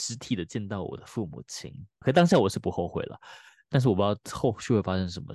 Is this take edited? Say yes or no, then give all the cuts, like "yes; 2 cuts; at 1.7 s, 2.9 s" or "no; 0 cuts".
yes; 2 cuts; at 2.0 s, 3.6 s